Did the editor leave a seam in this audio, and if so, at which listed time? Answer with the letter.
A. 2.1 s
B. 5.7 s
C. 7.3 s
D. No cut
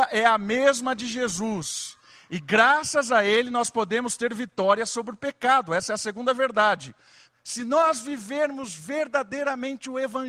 C